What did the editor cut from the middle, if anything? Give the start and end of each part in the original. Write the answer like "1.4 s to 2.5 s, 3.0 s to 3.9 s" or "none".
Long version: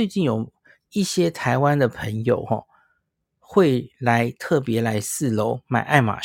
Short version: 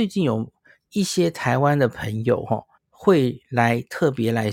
2.8 s to 3.3 s